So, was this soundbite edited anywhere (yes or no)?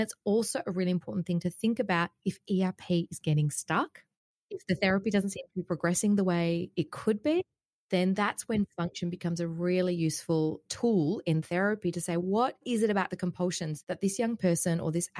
no